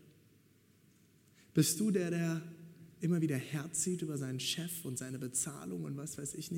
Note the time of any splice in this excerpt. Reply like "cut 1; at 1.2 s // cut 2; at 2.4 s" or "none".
none